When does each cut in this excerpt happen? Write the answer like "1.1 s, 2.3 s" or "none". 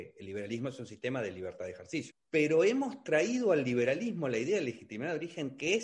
2.1 s